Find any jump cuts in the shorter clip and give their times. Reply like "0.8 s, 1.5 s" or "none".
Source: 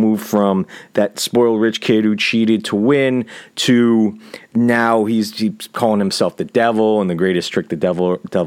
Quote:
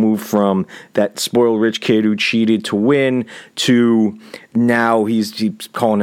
none